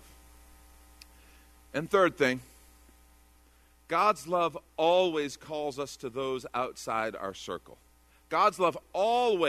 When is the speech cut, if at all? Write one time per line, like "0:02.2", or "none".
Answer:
none

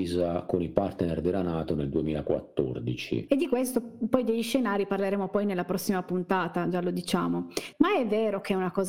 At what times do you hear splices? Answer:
0:03.3
0:07.7

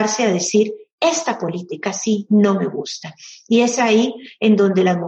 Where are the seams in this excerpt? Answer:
none

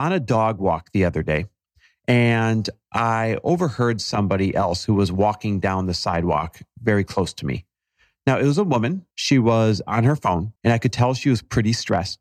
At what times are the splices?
0:09.1
0:10.6

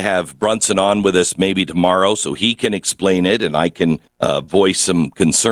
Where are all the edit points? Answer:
0:04.1

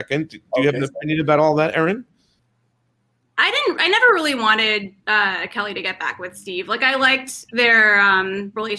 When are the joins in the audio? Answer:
none

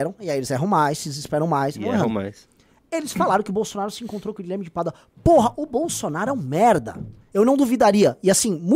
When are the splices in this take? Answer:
0:07.2

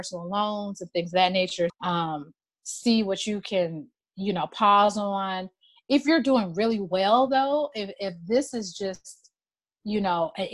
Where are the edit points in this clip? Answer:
0:01.7

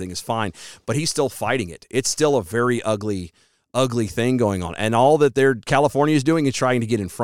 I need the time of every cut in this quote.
none

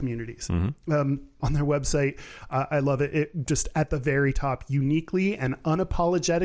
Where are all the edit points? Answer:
0:01.4

